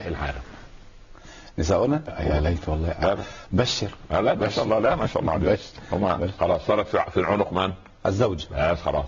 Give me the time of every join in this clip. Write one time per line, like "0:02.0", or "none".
0:02.1
0:06.4